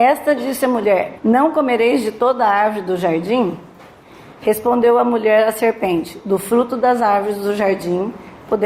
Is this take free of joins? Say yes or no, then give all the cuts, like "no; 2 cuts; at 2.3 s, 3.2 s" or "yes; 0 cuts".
no; 1 cut; at 1.2 s